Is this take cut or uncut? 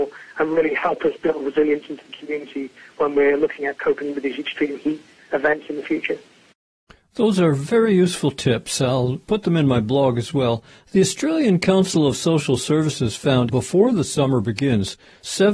cut